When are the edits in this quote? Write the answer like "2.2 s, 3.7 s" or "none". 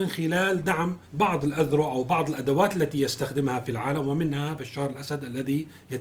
1.1 s